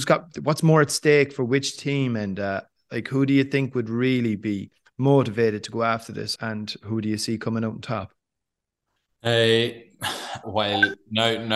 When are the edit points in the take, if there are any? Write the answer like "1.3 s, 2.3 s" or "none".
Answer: 6.4 s, 10.4 s